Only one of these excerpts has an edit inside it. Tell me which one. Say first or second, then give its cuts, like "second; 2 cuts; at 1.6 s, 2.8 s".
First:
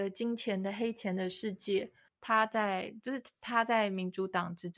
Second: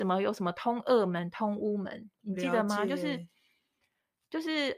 first; 1 cut; at 2.1 s